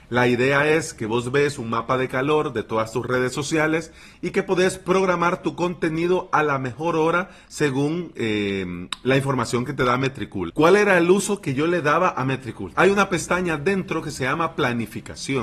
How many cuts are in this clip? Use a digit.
2